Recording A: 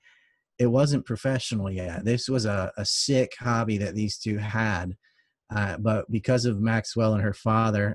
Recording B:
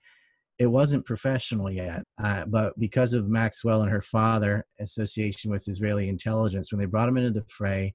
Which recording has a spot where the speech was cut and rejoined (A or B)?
B